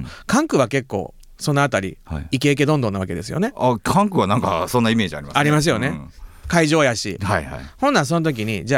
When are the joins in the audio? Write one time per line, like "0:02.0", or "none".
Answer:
none